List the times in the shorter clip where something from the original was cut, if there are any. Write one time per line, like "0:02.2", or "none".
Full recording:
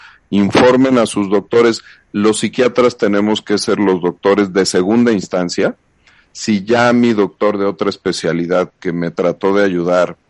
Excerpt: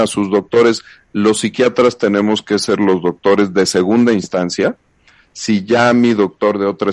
none